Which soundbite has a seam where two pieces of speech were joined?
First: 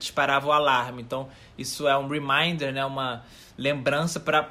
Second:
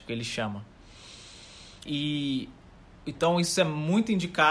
second; 1 cut; at 1.9 s

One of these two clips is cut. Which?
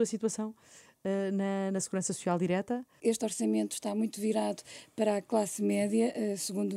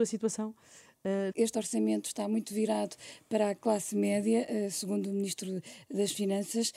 second; 1 cut; at 1.3 s

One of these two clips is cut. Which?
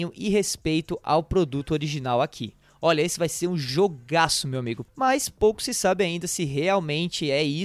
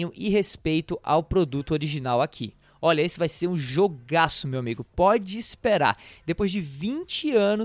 first; 1 cut; at 4.9 s

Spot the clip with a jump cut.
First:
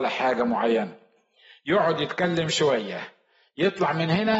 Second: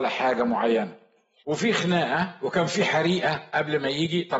second; 1 cut; at 1.4 s

